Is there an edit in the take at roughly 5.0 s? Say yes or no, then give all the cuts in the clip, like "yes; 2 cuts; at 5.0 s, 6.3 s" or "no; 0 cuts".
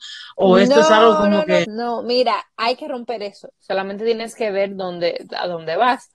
no; 2 cuts; at 1.6 s, 3.5 s